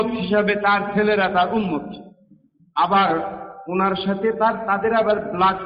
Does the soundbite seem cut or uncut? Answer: uncut